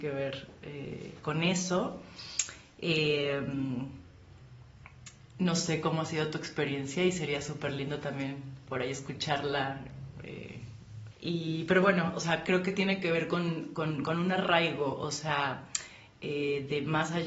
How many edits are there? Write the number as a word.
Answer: one